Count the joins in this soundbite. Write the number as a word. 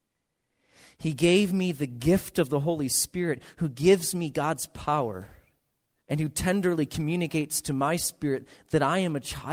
one